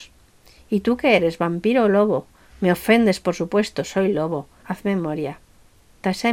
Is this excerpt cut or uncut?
cut